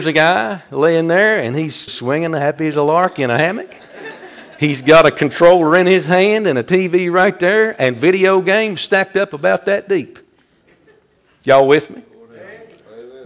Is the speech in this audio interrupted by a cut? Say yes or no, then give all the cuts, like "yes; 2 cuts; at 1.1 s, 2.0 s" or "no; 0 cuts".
yes; 1 cut; at 1.9 s